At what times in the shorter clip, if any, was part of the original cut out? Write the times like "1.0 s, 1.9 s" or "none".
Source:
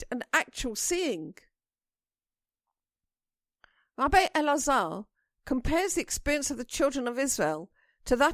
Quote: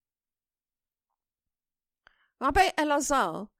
none